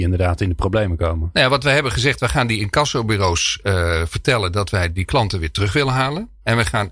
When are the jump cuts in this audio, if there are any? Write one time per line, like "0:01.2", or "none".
none